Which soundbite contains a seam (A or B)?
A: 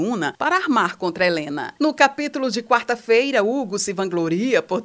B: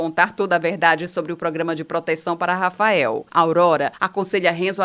B